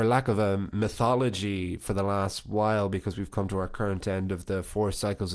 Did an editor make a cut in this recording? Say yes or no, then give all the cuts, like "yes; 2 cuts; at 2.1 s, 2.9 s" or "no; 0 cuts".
no; 0 cuts